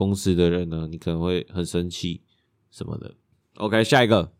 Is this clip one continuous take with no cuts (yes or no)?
no